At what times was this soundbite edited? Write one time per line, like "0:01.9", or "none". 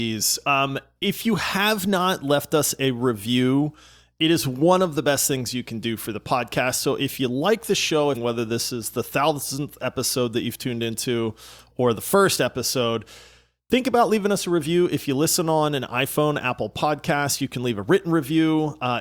0:08.1